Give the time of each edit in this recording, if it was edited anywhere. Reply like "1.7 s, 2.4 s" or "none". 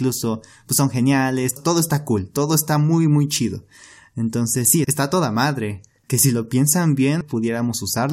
1.6 s, 4.8 s, 7.2 s